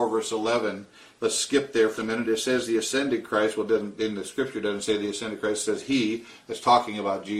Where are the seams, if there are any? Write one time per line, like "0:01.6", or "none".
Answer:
0:02.0